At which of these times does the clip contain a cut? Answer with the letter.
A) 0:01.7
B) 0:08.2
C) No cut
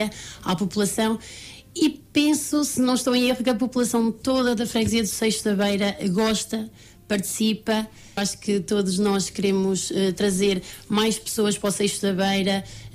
B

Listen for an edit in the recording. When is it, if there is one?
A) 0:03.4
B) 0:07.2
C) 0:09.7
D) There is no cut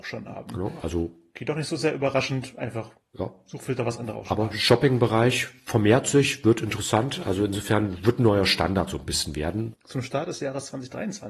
C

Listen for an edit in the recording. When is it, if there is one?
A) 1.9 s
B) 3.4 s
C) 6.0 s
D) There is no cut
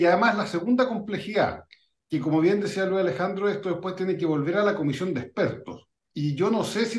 D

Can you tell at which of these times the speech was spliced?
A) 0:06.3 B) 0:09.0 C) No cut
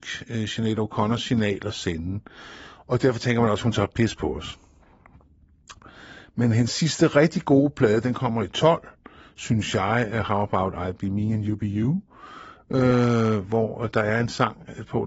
C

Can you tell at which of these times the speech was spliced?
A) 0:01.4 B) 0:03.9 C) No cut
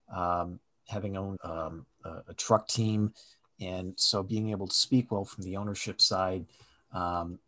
A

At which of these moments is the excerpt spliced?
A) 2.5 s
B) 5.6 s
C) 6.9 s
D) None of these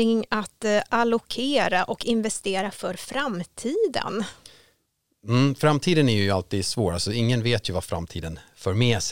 D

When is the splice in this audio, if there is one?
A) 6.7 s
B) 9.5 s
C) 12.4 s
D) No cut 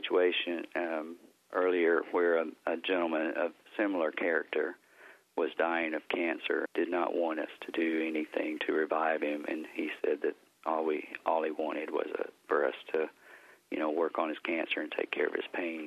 A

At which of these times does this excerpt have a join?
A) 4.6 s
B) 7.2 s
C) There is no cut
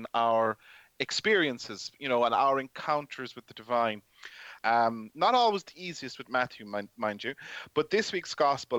A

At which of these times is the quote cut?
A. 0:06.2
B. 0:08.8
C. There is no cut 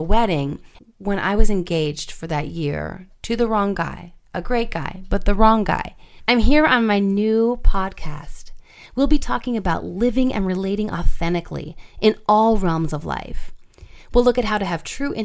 A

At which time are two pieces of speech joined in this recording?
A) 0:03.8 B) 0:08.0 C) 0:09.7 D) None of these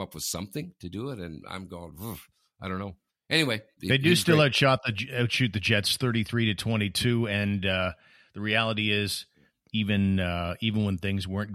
A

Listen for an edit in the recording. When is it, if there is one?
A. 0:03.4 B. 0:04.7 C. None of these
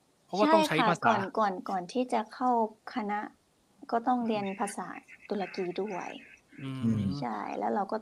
C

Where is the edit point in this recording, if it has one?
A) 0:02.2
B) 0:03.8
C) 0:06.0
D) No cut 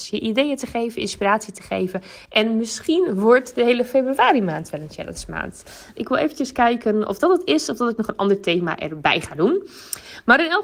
C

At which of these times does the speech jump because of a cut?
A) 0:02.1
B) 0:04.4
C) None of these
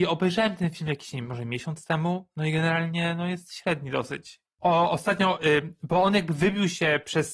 B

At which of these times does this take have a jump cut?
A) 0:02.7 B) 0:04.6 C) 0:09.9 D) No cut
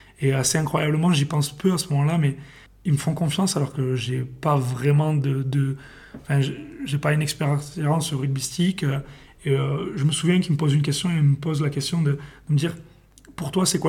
A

